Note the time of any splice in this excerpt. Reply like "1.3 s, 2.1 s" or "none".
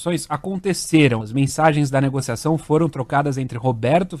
1.2 s